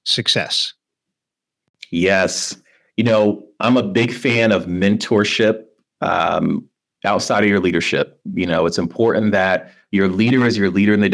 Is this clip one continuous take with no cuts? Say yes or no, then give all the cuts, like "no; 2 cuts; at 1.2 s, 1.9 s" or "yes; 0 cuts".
yes; 0 cuts